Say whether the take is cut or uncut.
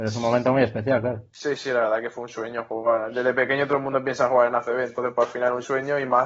uncut